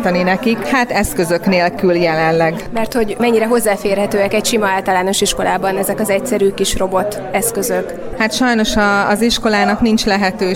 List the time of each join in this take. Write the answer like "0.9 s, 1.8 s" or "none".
none